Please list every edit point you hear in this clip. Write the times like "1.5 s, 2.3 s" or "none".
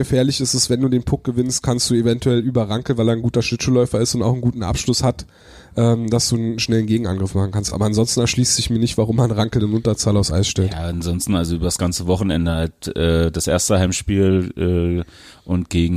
none